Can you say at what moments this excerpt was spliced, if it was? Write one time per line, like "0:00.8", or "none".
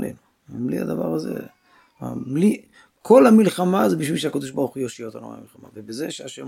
none